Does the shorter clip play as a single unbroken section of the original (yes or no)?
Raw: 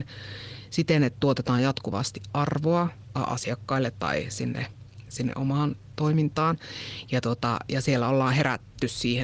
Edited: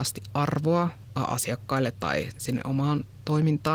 no